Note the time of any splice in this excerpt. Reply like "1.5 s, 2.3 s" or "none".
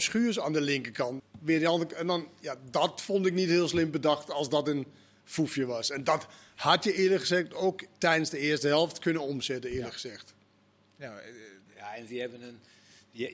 1.2 s